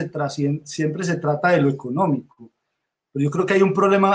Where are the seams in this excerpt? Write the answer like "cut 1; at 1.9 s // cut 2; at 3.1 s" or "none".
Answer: none